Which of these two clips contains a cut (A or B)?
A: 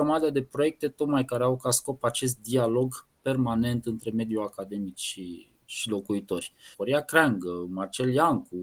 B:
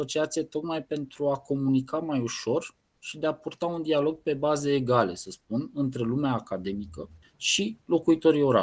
A